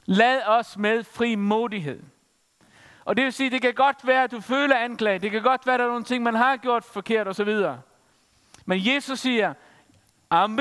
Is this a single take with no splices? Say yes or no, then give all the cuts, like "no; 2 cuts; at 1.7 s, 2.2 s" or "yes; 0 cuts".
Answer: yes; 0 cuts